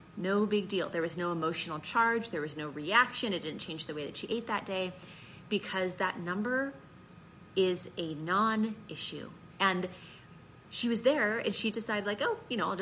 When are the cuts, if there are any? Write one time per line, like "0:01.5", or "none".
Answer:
0:09.5
0:11.7